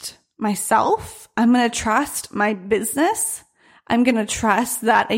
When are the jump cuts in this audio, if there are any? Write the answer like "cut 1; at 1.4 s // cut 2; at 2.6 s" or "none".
none